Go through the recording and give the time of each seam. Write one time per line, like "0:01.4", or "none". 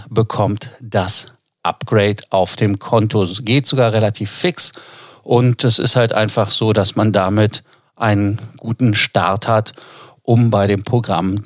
none